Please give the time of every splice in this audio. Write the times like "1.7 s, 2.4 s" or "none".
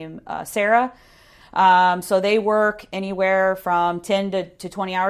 none